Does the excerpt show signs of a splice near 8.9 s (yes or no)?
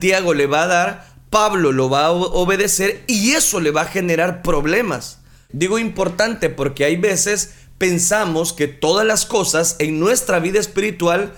no